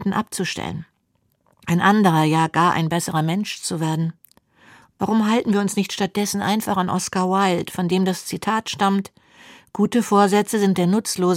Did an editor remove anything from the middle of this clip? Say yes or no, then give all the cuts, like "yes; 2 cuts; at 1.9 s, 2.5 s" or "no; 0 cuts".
no; 0 cuts